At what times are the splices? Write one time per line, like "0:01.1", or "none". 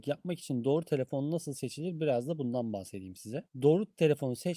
none

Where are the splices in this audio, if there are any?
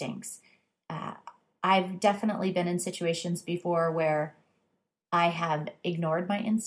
none

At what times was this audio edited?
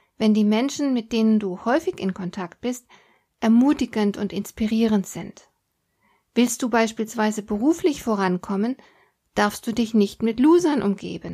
none

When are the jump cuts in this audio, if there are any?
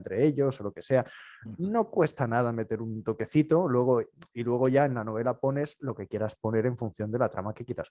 none

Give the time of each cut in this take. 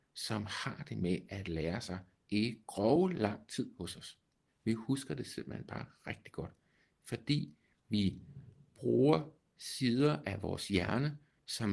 none

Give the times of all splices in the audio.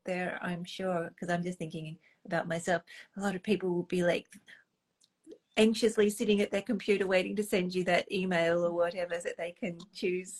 0:09.2

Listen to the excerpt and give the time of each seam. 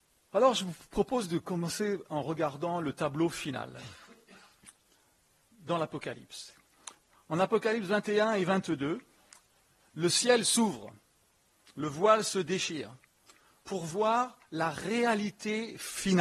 none

